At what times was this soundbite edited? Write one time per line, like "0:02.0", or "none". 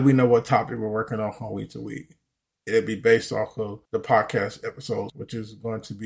0:03.9
0:05.1